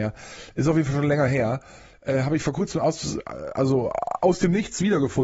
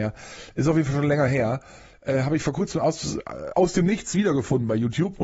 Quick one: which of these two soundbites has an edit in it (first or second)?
second